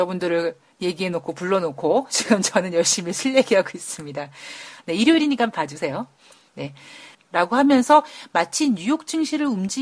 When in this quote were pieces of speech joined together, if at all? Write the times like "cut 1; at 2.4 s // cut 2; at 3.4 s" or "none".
cut 1; at 7.1 s